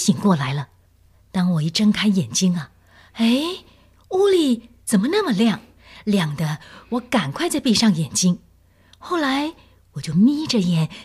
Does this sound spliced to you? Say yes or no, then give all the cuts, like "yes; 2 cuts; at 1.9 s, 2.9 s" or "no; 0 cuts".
no; 0 cuts